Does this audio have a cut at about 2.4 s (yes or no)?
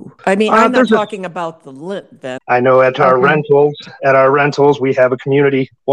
yes